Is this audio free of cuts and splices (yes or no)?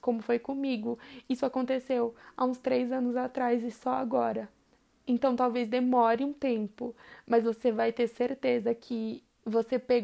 no